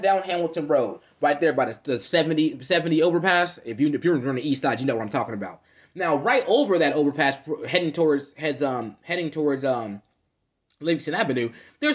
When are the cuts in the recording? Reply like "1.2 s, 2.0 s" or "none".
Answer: none